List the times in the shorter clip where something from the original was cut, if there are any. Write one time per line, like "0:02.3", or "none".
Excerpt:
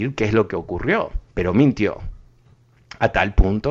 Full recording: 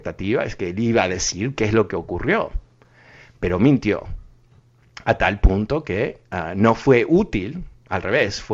0:01.3